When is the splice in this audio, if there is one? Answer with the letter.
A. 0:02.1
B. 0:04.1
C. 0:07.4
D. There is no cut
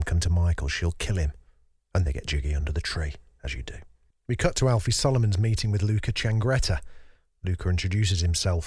A